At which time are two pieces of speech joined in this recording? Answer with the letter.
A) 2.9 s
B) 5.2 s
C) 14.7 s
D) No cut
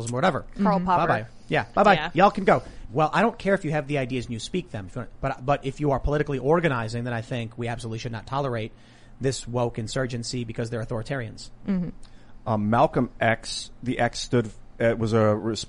A